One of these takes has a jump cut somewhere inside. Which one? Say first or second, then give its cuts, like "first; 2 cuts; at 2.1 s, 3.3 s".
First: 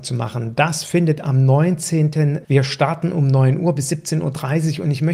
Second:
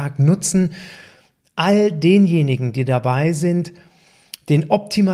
first; 1 cut; at 2.4 s